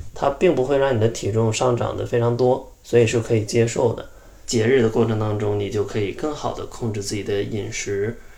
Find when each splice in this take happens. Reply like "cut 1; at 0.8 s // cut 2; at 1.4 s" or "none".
cut 1; at 4.4 s